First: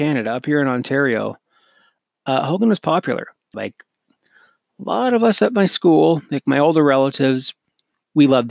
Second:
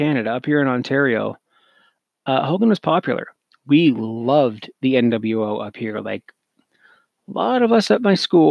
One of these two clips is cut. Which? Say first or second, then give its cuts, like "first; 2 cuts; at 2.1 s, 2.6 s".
first; 1 cut; at 3.5 s